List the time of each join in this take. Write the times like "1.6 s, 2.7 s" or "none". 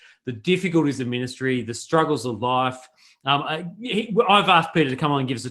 none